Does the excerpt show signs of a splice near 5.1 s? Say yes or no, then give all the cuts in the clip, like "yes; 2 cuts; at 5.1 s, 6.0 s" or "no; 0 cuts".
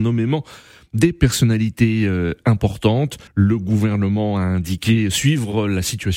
no; 1 cut; at 3.3 s